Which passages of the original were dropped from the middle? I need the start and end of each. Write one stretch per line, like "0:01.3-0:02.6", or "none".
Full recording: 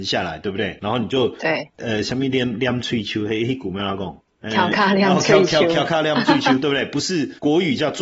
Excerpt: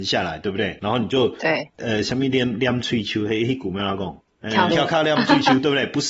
0:04.7-0:05.7